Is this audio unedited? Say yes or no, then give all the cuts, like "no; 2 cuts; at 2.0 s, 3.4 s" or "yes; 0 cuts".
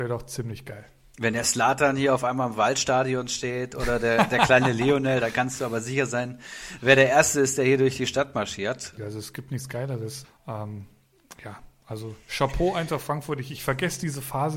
no; 2 cuts; at 9.0 s, 10.2 s